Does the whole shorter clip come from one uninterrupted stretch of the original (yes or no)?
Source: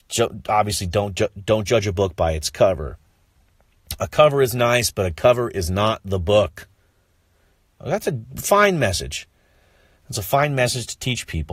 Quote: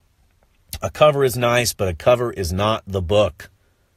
yes